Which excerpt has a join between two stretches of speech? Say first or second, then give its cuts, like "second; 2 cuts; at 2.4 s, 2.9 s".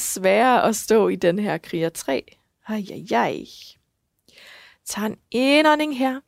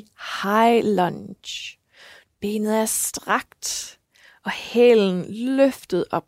second; 1 cut; at 2.2 s